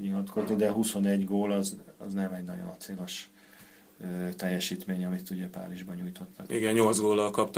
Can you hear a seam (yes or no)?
no